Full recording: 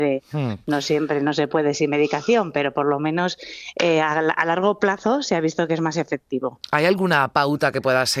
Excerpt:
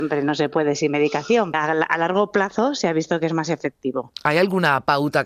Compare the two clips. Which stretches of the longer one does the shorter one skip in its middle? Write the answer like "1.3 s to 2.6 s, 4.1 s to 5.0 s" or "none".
2.5 s to 4.0 s